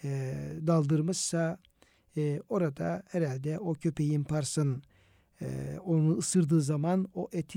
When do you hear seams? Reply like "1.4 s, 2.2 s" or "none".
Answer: none